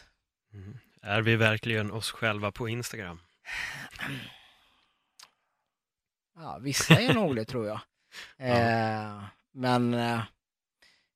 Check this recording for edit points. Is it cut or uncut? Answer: uncut